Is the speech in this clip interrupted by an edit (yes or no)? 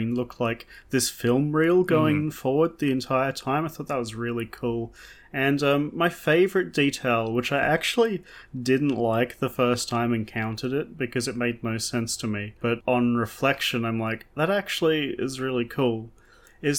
no